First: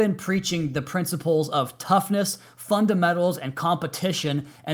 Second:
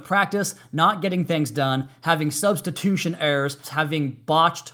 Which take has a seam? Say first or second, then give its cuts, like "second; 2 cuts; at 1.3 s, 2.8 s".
second; 1 cut; at 3.6 s